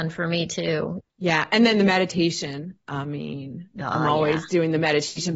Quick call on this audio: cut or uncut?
cut